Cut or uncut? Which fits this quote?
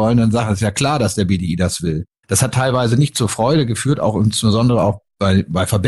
cut